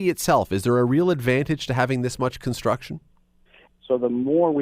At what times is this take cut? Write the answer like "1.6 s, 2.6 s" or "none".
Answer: 3.7 s